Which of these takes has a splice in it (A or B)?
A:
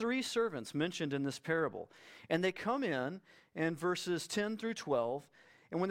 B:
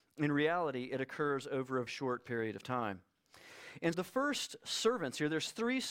B